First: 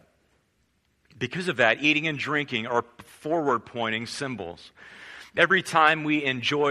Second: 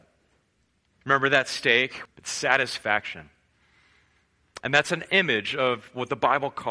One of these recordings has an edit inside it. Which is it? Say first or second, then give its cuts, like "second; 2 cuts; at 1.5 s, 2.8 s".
second; 2 cuts; at 0.9 s, 2.0 s